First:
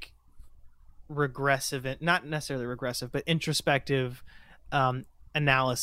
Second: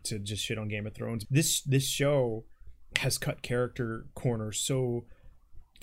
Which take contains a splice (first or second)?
second